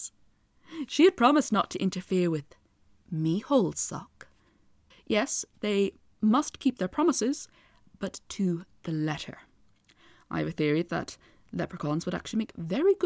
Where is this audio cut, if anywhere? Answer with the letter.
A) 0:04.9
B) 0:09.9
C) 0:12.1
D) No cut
A